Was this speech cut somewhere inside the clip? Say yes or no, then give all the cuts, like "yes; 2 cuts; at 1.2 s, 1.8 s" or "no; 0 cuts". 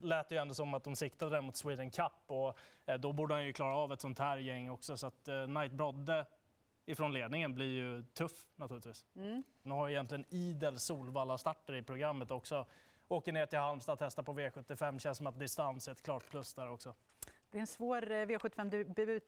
yes; 1 cut; at 9.6 s